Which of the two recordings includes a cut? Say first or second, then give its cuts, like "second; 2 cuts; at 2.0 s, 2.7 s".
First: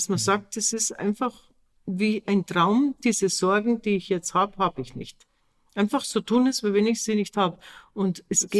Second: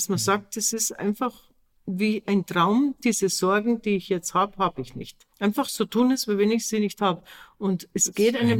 second; 1 cut; at 5.3 s